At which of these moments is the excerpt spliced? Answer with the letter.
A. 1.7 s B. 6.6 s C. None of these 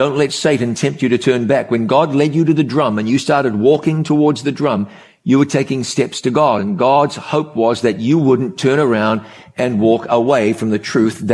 C